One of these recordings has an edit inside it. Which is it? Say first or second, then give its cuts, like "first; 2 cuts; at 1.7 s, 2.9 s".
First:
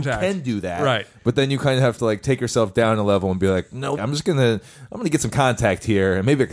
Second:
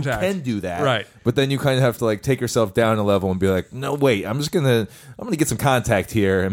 first; 1 cut; at 4.0 s